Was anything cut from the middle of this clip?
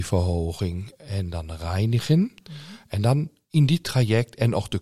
no; 0 cuts

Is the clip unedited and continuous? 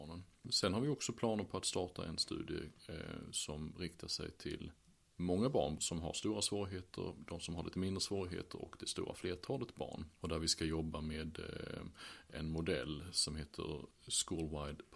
no; 2 cuts; at 5.8 s, 10.2 s

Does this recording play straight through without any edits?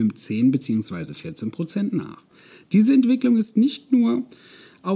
yes; 0 cuts

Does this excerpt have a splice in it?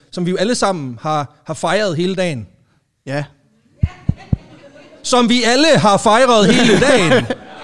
no; 0 cuts

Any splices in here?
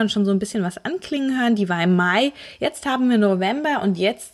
no; 0 cuts

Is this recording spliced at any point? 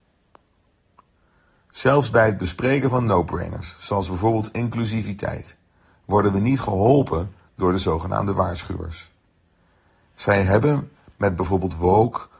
no; 0 cuts

